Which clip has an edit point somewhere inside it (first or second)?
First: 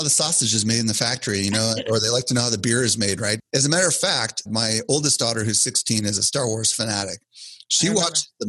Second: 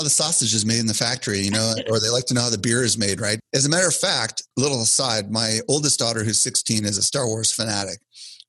first